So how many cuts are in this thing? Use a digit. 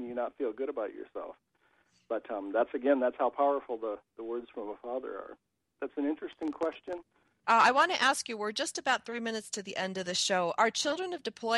2